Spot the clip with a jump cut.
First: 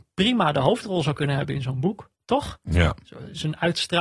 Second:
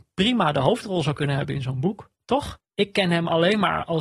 second; 1 cut; at 2.6 s

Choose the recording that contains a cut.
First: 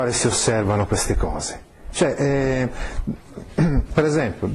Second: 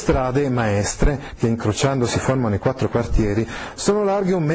first; 1 cut; at 1.9 s

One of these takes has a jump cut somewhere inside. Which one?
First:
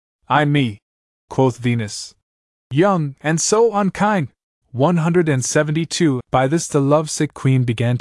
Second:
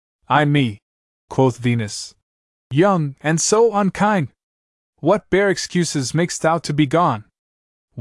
first; 2 cuts; at 4.6 s, 6.2 s

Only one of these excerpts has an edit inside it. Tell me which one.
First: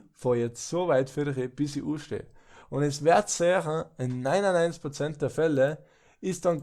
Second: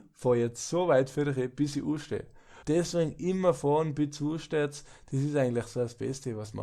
second; 1 cut; at 2.6 s

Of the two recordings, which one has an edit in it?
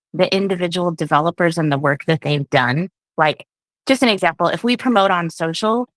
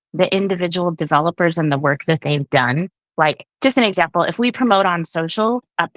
second; 1 cut; at 3.5 s

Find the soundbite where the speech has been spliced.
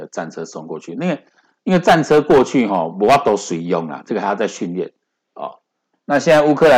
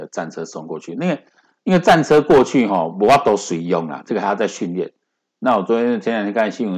first; 1 cut; at 5.2 s

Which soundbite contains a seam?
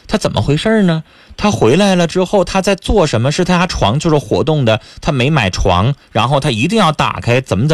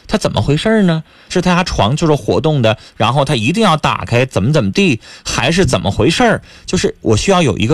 second; 2 cuts; at 1.3 s, 2.9 s

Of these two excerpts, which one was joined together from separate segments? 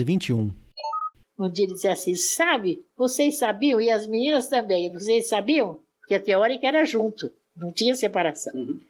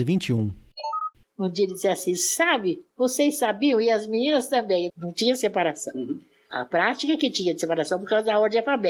second; 1 cut; at 4.9 s

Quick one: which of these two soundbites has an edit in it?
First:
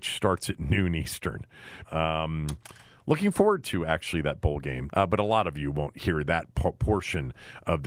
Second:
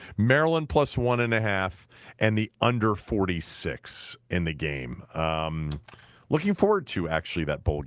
first; 2 cuts; at 1.8 s, 4.9 s

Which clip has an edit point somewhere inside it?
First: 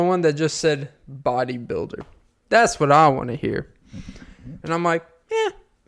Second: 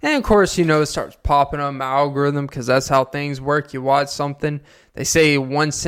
first; 2 cuts; at 2.4 s, 4.6 s

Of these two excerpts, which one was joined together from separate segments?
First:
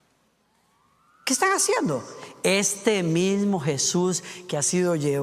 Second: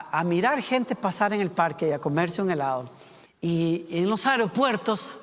second; 1 cut; at 3.3 s

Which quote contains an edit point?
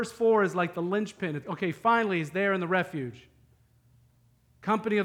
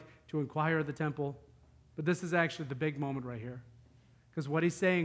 first; 1 cut; at 1.4 s

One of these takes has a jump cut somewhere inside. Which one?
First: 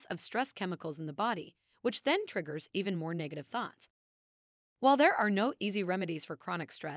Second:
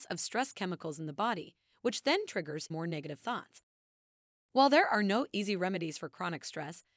second; 1 cut; at 2.7 s

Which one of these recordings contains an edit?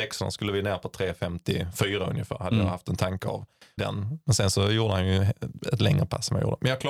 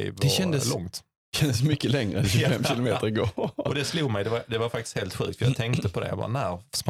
first; 1 cut; at 3.8 s

